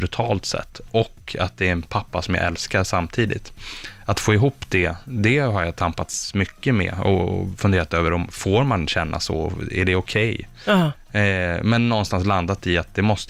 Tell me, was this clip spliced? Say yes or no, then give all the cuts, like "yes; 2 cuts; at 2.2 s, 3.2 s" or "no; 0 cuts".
no; 0 cuts